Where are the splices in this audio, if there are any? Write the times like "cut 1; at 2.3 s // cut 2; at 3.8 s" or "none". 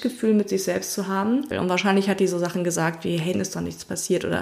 cut 1; at 1.5 s // cut 2; at 3.3 s